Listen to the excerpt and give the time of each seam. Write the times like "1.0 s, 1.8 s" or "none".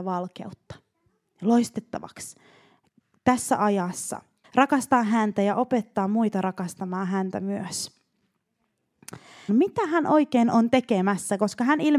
4.4 s, 9.5 s